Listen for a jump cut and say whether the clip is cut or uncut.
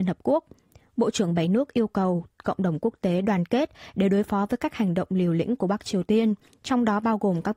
uncut